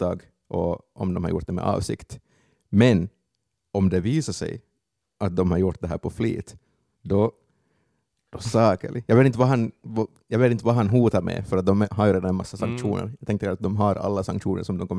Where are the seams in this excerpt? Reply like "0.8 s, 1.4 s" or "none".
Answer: none